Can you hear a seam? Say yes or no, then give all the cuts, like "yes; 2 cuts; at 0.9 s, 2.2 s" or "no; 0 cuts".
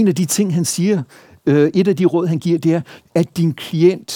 yes; 1 cut; at 3.0 s